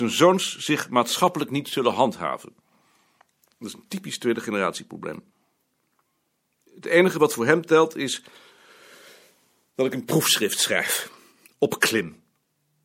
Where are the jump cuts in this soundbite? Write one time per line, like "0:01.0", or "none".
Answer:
0:11.5